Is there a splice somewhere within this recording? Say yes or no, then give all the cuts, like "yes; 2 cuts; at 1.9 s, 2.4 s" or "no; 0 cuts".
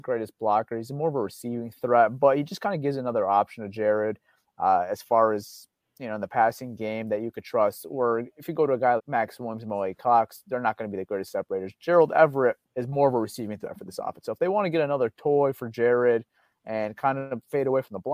yes; 2 cuts; at 9.0 s, 12.7 s